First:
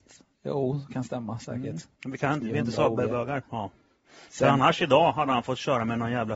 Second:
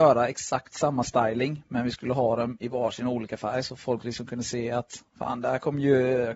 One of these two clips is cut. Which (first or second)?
first